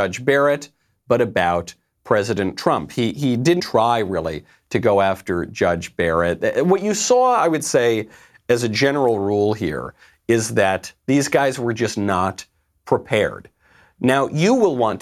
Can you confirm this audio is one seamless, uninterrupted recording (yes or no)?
no